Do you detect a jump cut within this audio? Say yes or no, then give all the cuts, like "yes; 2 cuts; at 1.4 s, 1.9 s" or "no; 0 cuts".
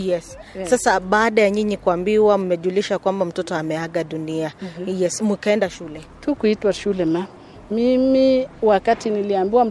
no; 0 cuts